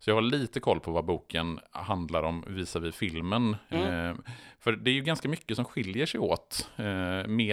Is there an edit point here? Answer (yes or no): no